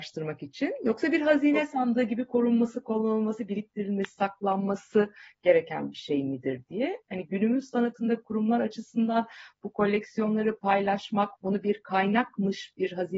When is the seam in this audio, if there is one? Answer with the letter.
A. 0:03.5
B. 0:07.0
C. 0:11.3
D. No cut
C